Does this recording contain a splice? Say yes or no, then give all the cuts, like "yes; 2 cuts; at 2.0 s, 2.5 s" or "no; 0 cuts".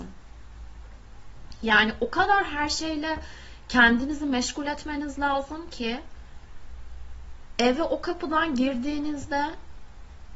no; 0 cuts